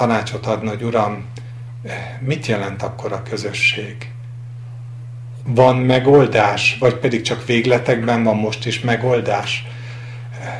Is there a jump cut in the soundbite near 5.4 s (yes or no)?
yes